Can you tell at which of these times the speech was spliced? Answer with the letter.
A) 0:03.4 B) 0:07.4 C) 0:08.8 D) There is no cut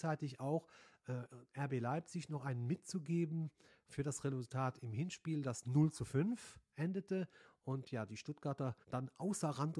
C